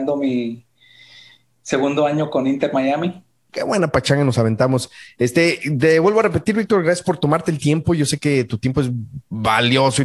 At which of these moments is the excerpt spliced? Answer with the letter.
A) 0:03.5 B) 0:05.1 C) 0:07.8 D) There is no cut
A